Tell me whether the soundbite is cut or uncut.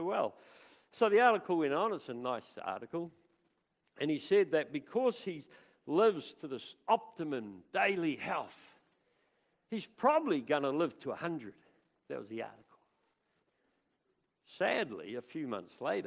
uncut